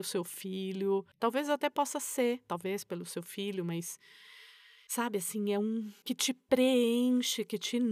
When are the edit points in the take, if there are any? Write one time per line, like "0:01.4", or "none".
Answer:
0:06.0